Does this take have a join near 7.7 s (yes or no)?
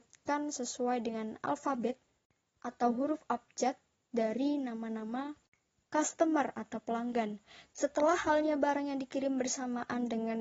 yes